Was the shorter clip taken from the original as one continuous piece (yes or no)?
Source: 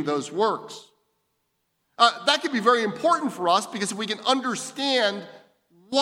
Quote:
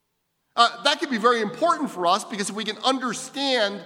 yes